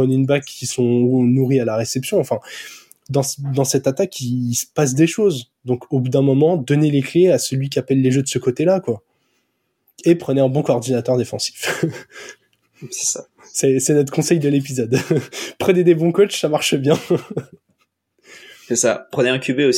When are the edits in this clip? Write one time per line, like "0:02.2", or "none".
none